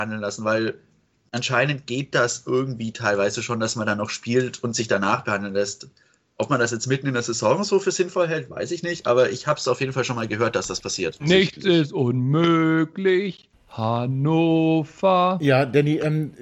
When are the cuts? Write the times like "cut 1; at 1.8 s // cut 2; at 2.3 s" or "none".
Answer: cut 1; at 11.2 s